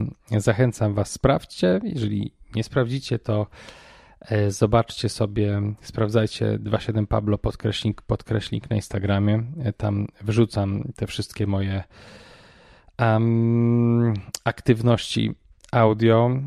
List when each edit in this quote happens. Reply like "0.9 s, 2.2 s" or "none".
none